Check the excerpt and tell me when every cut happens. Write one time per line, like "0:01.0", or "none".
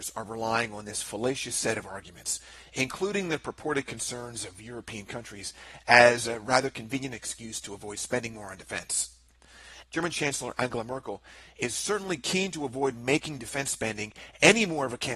0:09.8